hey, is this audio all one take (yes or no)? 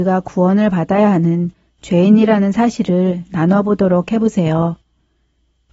yes